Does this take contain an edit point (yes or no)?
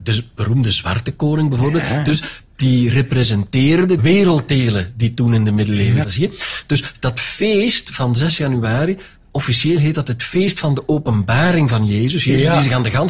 yes